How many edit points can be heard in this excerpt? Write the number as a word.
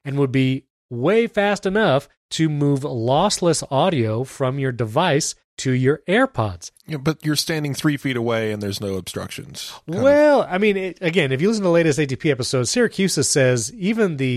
zero